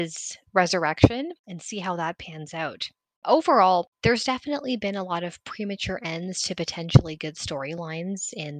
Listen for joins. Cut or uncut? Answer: uncut